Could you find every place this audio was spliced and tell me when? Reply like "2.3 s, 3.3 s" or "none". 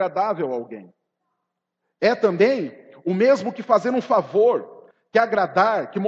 none